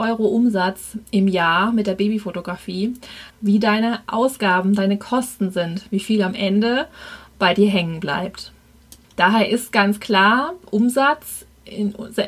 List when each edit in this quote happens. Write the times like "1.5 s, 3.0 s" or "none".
3.3 s